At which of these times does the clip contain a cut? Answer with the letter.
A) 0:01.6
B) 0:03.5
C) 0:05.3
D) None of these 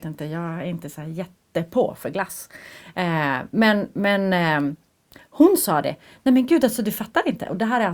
D